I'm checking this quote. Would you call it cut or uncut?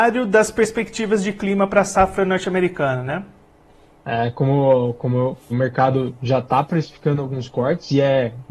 cut